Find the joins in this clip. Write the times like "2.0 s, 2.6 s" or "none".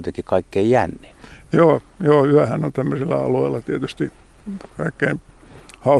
4.7 s